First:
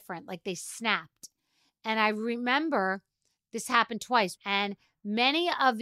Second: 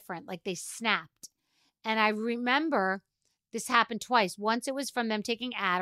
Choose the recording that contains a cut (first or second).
first